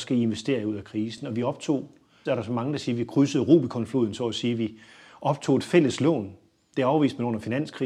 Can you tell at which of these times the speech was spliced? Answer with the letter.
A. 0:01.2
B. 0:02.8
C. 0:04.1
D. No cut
D